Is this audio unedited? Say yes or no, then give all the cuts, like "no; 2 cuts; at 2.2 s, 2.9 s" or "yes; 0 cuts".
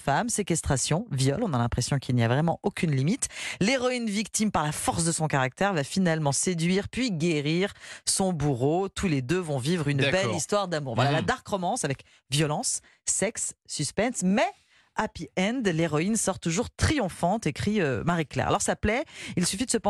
yes; 0 cuts